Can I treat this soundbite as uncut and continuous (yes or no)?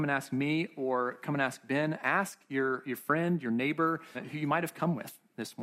no